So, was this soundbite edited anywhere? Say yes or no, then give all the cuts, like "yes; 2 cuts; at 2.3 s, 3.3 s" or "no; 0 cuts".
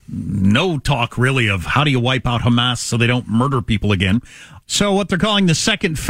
yes; 1 cut; at 4.6 s